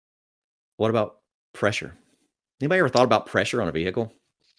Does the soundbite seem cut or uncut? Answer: uncut